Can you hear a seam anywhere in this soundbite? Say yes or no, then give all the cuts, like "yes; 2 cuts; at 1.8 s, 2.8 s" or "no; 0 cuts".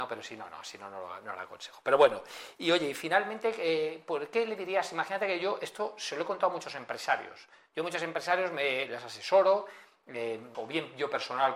yes; 1 cut; at 10.5 s